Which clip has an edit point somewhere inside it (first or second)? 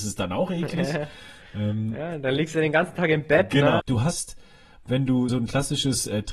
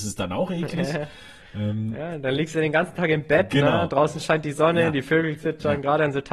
first